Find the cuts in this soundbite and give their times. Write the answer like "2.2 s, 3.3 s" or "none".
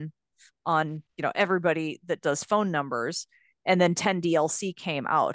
none